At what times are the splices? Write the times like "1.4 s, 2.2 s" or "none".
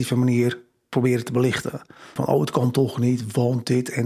2.2 s